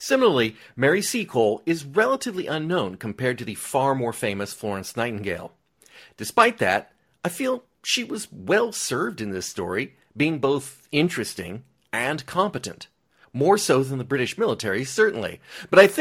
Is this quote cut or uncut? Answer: uncut